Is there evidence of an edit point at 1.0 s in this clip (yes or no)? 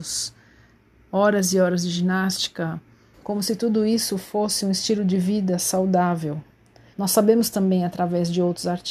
no